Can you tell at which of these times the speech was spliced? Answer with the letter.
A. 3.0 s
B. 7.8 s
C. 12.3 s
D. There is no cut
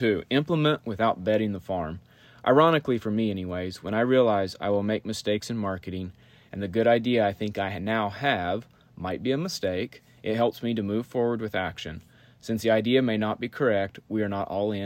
D